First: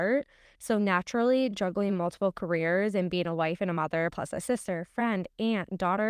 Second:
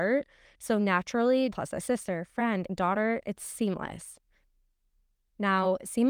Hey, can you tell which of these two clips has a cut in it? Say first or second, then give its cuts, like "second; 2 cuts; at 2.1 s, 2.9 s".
second; 2 cuts; at 1.5 s, 2.7 s